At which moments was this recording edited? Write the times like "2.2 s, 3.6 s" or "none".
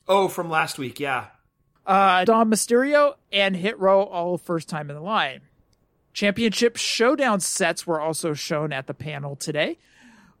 2.3 s